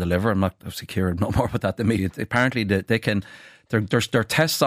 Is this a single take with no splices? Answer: no; 1 cut; at 2.0 s

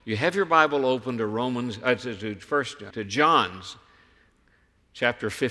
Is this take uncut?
no; 1 cut; at 2.9 s

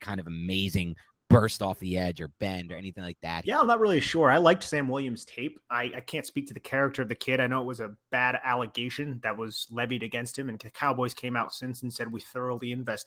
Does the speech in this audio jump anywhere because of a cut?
yes; 1 cut; at 3.4 s

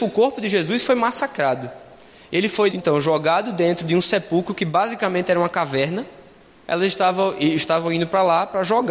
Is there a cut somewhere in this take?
yes; 2 cuts; at 2.7 s, 6.7 s

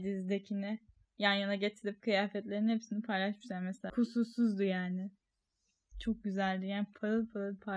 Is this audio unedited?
no; 1 cut; at 3.9 s

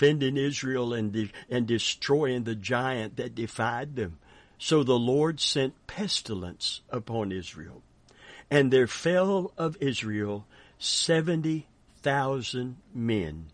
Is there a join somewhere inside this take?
yes; 1 cut; at 4.4 s

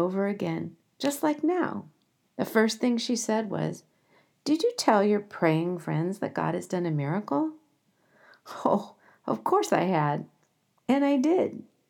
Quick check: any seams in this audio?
yes; 1 cut; at 2.2 s

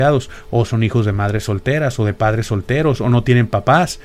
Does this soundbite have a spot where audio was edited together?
no; 0 cuts

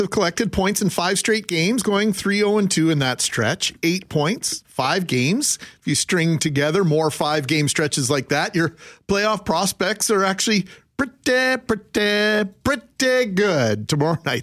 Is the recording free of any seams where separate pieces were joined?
yes; 0 cuts

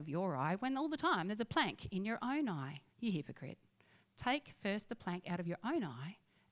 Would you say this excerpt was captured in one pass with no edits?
no; 1 cut; at 2.9 s

